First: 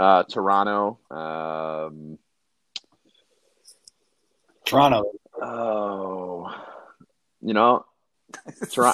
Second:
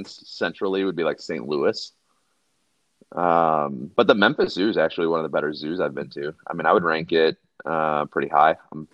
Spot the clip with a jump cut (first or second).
first